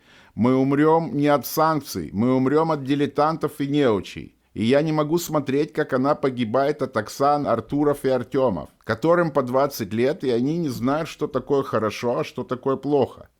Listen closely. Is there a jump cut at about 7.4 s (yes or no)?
yes